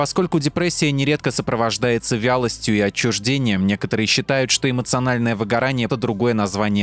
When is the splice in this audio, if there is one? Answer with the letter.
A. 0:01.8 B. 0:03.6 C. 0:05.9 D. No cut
C